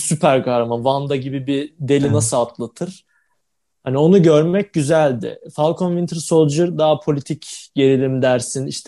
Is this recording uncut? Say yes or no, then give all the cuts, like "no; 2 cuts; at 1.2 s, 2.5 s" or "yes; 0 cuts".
yes; 0 cuts